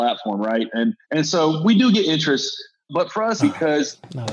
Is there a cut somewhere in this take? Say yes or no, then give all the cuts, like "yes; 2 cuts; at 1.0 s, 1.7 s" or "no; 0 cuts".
yes; 2 cuts; at 1.0 s, 3.4 s